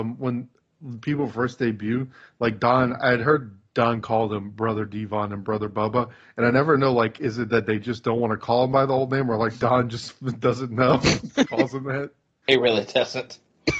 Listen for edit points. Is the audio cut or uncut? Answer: cut